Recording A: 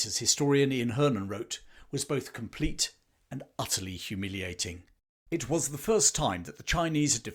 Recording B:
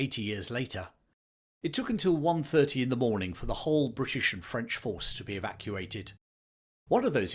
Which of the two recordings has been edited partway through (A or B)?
B